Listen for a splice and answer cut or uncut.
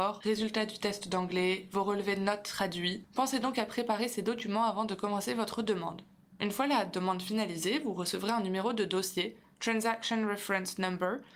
uncut